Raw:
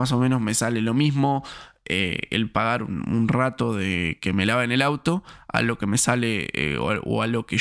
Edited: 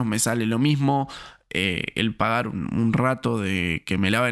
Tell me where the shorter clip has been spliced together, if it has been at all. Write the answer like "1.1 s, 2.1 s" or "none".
none

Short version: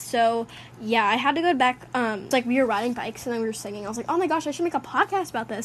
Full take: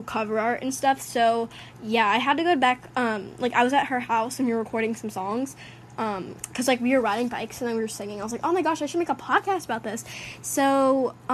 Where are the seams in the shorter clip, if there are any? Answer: 2.3 s

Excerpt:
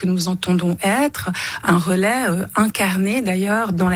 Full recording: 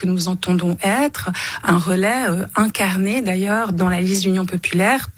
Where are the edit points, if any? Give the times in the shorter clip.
none

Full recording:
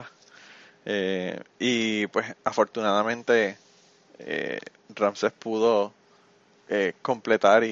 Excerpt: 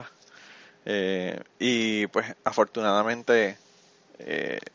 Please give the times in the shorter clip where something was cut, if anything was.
none

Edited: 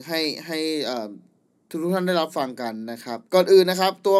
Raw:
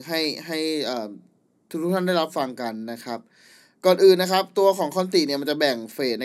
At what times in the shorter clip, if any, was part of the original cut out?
3.2 s

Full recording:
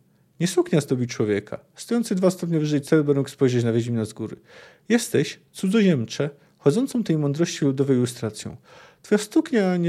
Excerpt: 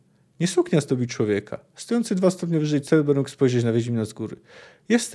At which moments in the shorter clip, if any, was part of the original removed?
none

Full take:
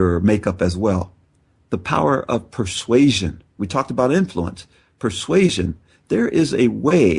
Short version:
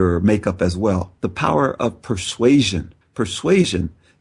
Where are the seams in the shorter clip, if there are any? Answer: 1.2 s, 3.0 s

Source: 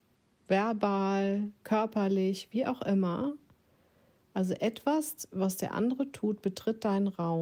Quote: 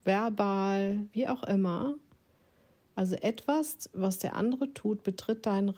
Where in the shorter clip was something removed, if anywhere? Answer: 1.1 s

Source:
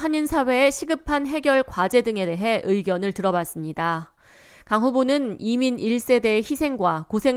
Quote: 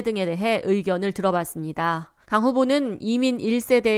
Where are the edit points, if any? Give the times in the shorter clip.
2.2 s

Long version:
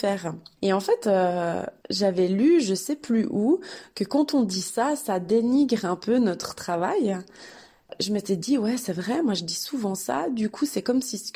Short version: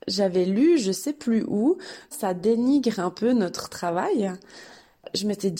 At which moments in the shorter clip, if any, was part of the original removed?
2.1 s

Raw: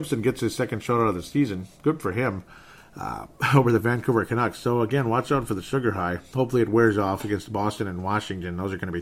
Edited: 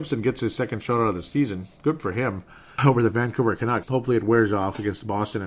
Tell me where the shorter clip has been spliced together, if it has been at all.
2.8 s, 3.8 s

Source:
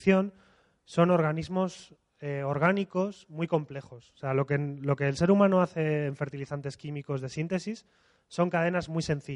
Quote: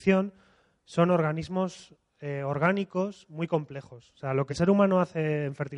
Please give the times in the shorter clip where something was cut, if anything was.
4.5 s

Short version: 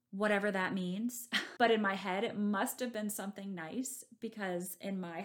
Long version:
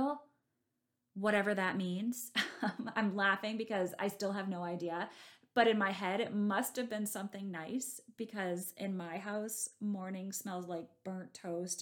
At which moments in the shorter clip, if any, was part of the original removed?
1.6 s

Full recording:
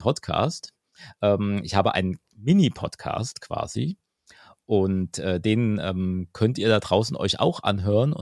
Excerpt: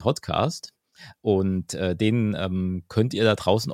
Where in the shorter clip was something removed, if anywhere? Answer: 1.2 s

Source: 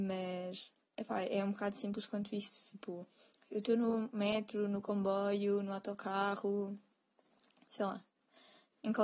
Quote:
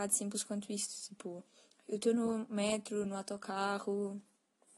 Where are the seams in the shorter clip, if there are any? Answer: 3.0 s

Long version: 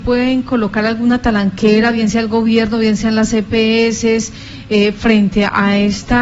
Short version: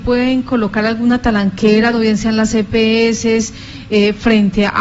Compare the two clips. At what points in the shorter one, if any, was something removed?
1.9 s

